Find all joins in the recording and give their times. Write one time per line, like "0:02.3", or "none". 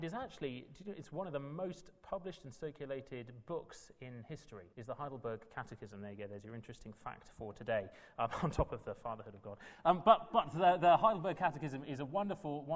0:04.7